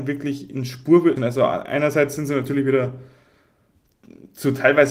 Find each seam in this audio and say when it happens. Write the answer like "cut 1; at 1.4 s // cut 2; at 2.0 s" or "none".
cut 1; at 1.2 s